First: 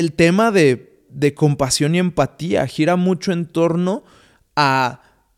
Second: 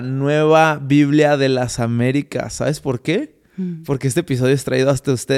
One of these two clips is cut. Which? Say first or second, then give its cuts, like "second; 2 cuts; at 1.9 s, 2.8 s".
second; 1 cut; at 3.5 s